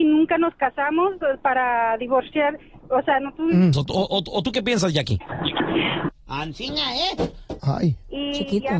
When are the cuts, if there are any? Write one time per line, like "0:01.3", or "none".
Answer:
0:03.7
0:06.1
0:07.6